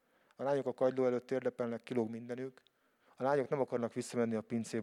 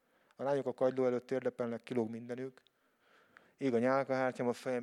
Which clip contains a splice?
first; 1 cut; at 3.1 s

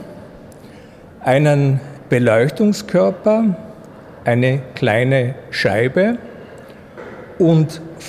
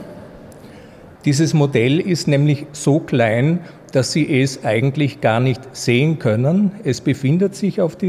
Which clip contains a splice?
second; 1 cut; at 1.2 s

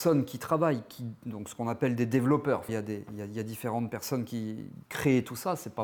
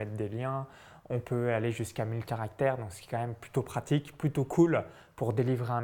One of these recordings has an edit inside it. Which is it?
first; 2 cuts; at 2.7 s, 4.9 s

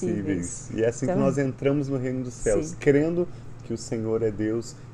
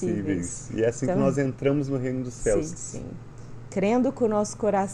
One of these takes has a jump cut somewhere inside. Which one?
second; 1 cut; at 2.8 s

